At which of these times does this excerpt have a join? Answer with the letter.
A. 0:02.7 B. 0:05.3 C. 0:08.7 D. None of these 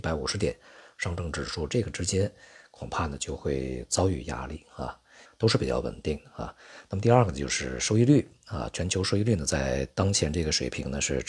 B